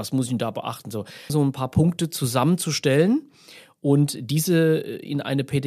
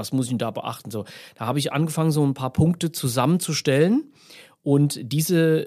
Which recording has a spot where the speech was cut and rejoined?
first; 1 cut; at 1.3 s

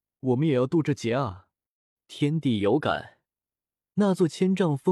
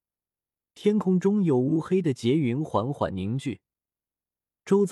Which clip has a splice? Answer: first; 1 cut; at 2.0 s

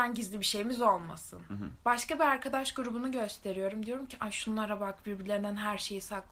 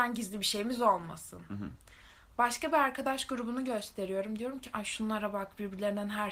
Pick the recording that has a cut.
first; 1 cut; at 1.8 s

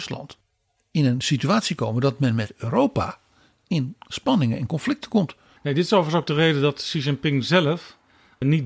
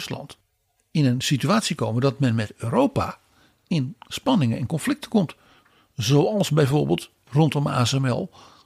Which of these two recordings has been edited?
first; 1 cut; at 5.6 s

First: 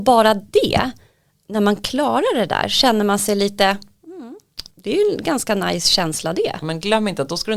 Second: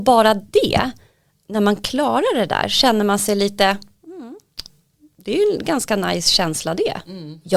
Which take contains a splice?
first; 2 cuts; at 4.7 s, 6.6 s

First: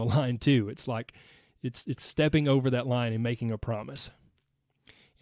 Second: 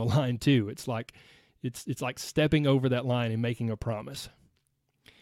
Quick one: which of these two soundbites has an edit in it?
first; 1 cut; at 2.0 s

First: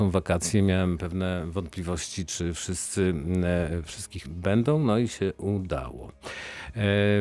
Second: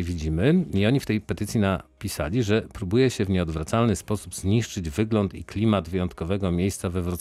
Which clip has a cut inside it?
first; 1 cut; at 4.2 s

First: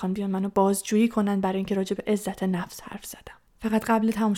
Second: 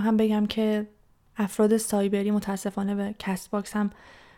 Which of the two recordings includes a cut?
first; 1 cut; at 3.5 s

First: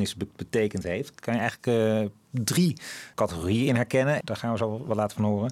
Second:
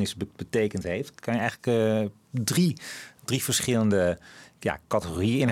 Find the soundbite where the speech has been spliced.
first; 2 cuts; at 3.1 s, 4.2 s

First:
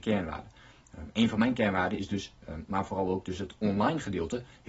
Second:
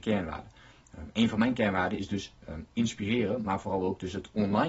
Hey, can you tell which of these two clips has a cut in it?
first; 1 cut; at 2.7 s

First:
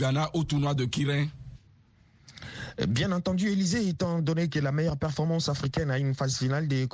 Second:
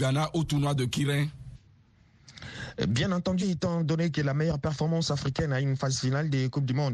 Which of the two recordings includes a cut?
second; 1 cut; at 3.4 s

